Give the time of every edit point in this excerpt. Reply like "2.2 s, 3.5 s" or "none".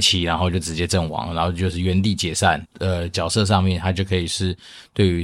2.6 s